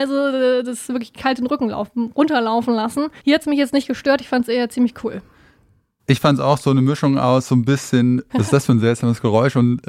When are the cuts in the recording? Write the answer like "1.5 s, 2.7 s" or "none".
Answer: 3.2 s, 8.3 s

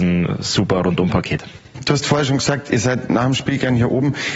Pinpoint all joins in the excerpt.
none

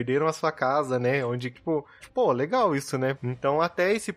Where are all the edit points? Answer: 2.0 s, 3.1 s

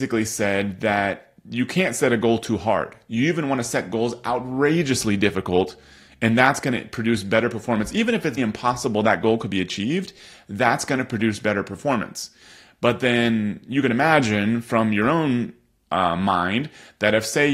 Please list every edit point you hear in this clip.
8.4 s

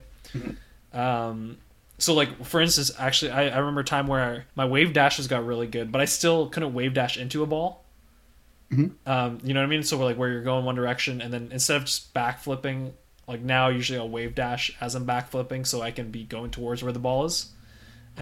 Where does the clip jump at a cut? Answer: 4.5 s

